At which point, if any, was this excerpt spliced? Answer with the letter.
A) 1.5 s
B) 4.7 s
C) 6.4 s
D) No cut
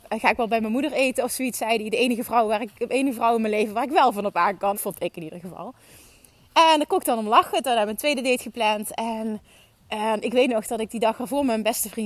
B